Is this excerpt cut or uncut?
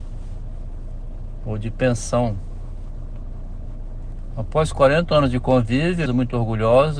cut